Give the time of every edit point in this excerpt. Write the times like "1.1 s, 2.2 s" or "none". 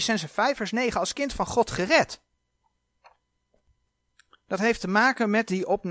none